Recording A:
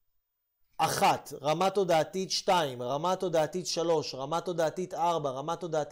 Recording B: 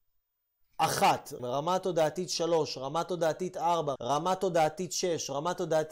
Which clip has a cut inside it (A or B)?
B